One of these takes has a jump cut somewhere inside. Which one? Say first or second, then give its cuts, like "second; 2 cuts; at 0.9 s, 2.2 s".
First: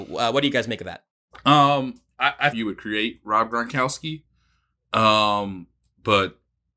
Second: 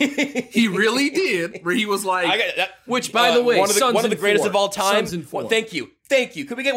first; 1 cut; at 2.5 s